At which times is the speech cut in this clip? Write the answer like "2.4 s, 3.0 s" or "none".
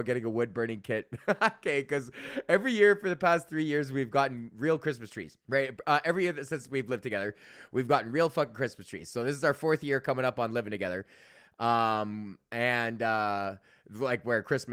5.4 s